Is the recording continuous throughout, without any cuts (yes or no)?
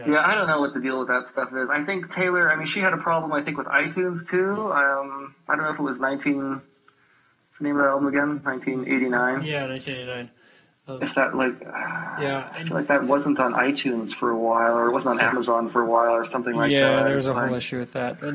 yes